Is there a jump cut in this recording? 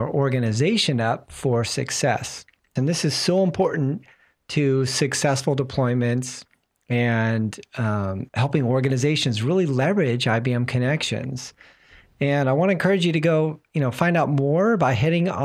yes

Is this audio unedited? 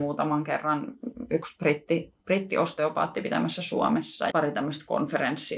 no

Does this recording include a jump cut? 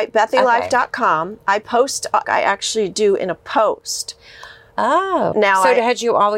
yes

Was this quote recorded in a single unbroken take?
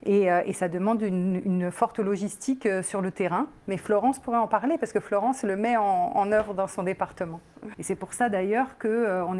no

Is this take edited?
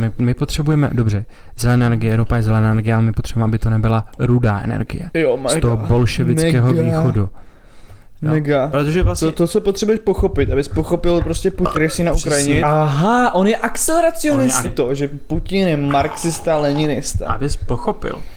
yes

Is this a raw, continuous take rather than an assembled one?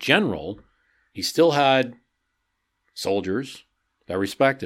yes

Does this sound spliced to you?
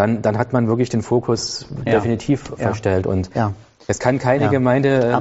no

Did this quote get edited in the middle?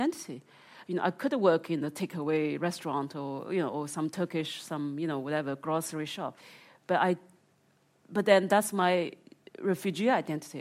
no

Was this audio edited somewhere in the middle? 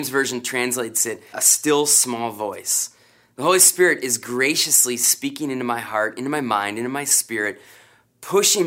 yes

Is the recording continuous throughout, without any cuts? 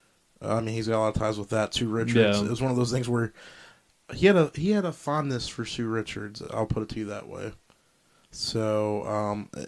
yes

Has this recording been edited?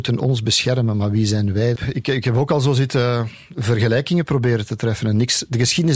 yes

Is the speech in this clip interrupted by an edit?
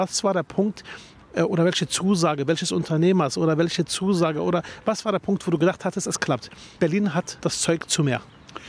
no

